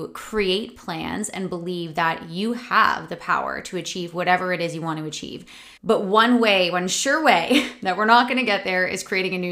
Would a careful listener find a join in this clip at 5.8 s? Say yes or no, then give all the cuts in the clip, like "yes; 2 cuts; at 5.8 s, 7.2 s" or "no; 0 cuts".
yes; 1 cut; at 5.8 s